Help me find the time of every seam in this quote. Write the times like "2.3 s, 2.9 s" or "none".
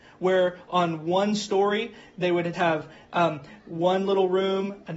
2.5 s